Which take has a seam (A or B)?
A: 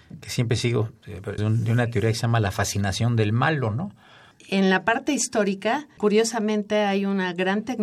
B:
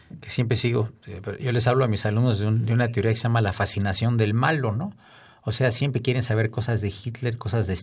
A